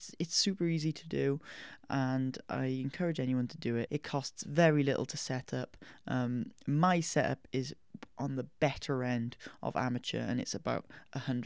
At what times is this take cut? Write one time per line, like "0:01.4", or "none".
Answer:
0:03.9